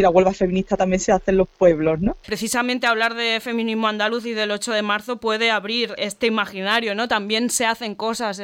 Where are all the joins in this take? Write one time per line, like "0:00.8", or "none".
0:02.2
0:06.0